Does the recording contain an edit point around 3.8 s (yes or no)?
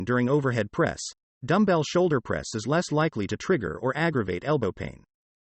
no